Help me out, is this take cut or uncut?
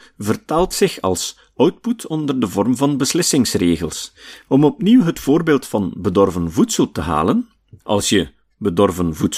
cut